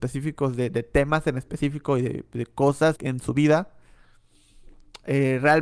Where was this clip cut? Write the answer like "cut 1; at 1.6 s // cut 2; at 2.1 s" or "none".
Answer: cut 1; at 3.0 s